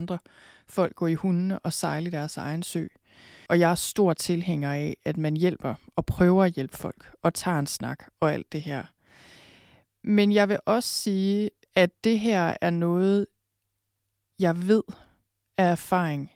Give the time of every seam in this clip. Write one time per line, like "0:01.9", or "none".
0:03.5
0:11.7